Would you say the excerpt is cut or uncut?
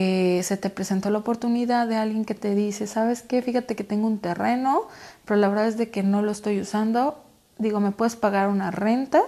uncut